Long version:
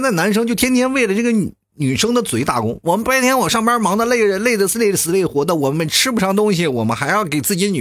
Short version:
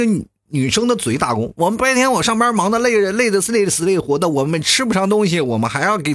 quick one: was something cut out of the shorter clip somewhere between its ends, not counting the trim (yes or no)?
no